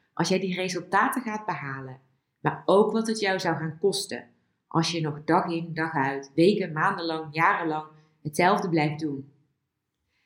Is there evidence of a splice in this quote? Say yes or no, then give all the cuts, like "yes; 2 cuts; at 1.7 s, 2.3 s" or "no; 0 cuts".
no; 0 cuts